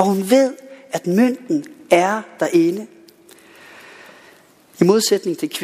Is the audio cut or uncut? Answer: uncut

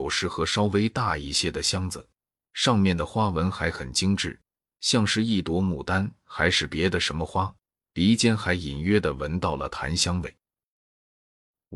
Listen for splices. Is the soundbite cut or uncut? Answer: uncut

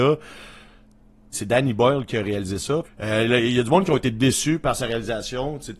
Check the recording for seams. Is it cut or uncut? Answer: cut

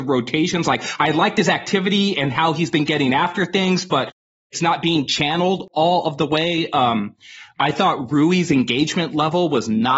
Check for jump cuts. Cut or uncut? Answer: uncut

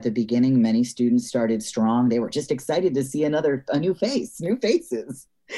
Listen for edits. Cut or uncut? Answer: uncut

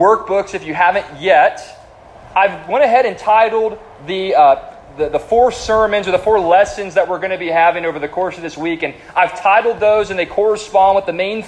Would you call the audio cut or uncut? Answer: uncut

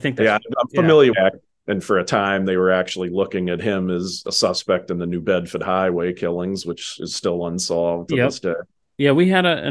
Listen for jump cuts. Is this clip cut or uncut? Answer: cut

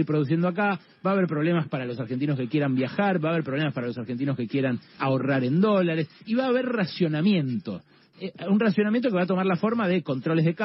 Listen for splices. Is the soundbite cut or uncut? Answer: cut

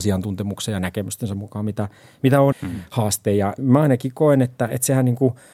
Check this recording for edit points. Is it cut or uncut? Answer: cut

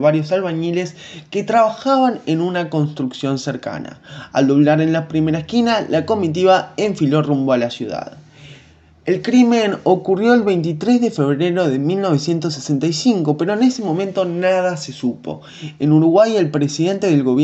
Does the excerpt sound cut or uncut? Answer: uncut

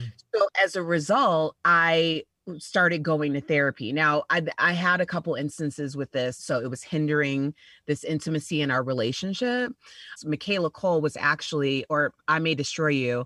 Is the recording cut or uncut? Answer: cut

